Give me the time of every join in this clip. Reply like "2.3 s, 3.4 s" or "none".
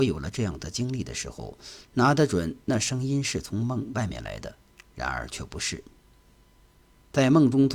1.8 s